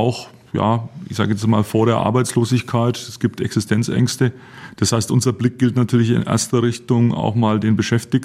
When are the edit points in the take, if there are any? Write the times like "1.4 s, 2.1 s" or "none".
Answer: none